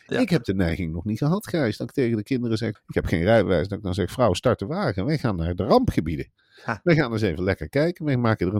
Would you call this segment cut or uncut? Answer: cut